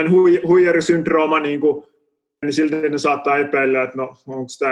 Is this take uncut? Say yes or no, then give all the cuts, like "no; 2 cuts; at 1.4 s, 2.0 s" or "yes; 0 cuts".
no; 1 cut; at 2.4 s